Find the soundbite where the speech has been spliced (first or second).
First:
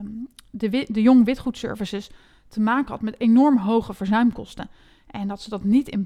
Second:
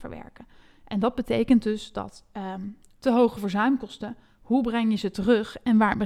second